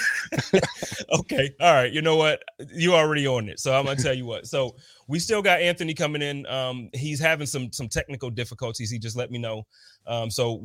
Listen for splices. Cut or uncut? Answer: uncut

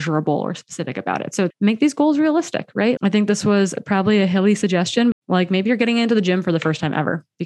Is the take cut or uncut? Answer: cut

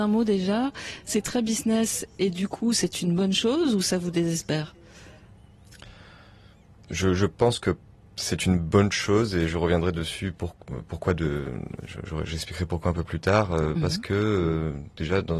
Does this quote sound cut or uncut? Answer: uncut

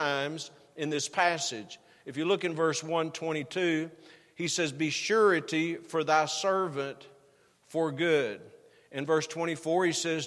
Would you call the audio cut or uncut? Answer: uncut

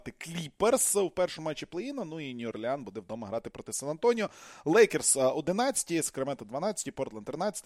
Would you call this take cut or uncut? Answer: uncut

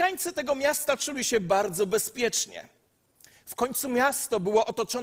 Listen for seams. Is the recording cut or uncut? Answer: uncut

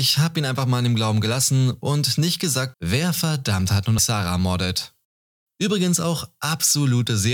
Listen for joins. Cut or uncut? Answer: cut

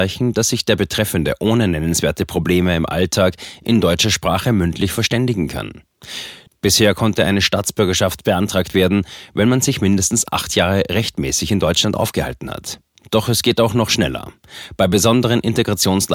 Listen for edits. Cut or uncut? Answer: cut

